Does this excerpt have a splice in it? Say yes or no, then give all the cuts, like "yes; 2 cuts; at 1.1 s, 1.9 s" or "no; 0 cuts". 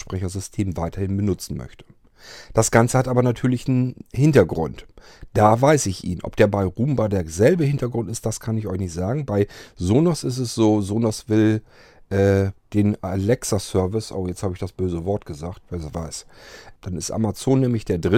yes; 2 cuts; at 15.6 s, 16.8 s